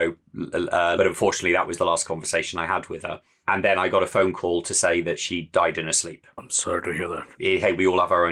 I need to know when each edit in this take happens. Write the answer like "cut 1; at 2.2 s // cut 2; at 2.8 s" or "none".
cut 1; at 1.0 s // cut 2; at 6.4 s